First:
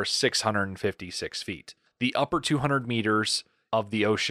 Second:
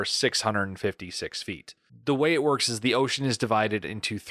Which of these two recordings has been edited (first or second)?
first